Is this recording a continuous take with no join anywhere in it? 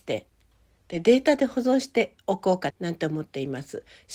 no; 1 cut; at 2.7 s

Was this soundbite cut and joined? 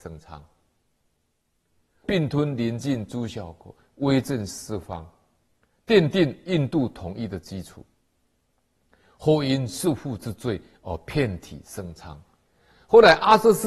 yes; 1 cut; at 2.0 s

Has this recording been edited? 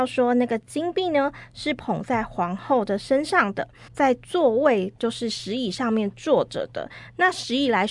yes; 1 cut; at 3.9 s

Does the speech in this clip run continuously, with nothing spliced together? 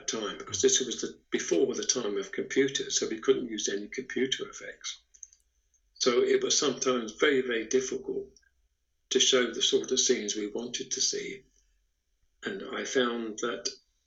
yes; 0 cuts

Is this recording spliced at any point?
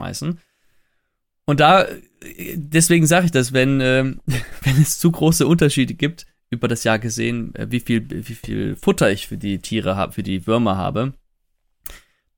no; 0 cuts

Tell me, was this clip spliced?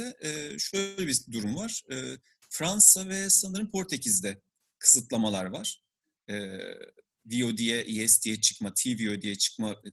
no; 0 cuts

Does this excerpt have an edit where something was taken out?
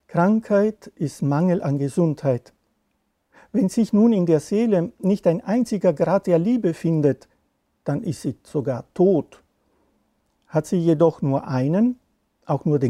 no; 0 cuts

